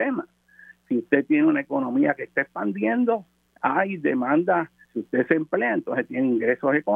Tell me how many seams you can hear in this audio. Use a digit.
1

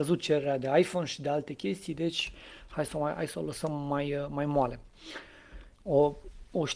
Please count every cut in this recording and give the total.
1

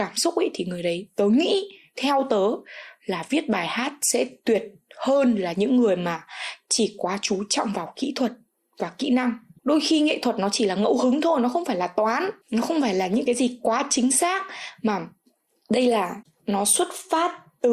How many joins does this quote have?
0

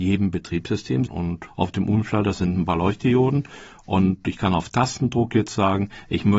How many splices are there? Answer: 1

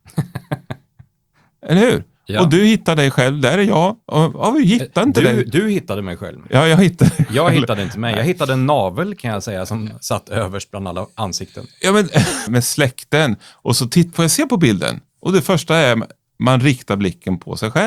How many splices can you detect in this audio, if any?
2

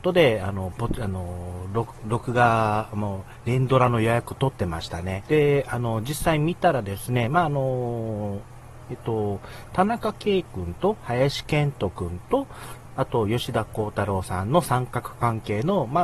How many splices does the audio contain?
2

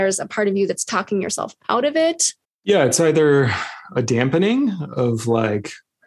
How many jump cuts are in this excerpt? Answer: 1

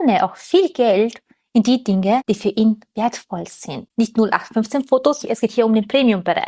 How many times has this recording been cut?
2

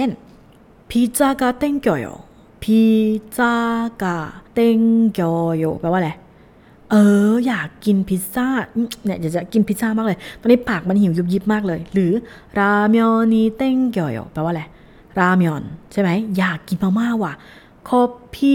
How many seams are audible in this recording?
1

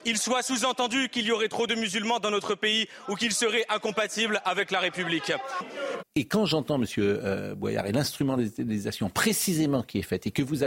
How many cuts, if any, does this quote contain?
1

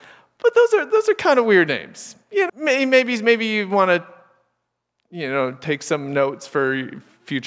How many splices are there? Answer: 1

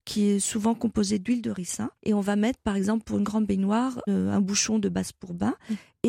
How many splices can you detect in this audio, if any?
2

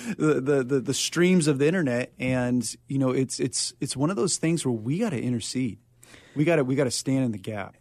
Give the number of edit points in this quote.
0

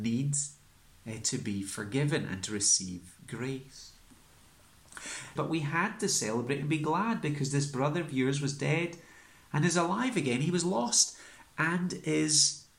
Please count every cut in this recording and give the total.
1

